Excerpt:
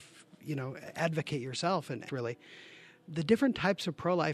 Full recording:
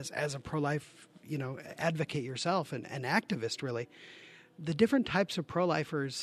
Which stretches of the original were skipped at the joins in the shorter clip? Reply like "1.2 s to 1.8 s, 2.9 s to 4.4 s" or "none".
2.9 s to 3.6 s